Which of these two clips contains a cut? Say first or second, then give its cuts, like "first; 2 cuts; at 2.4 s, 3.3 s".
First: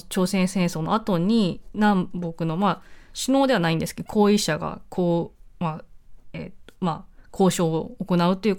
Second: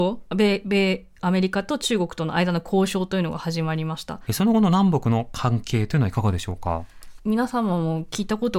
second; 2 cuts; at 4.3 s, 7.2 s